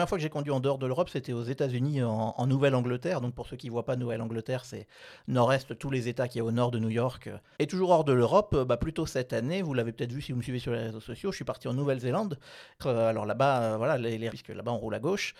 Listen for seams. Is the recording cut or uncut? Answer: cut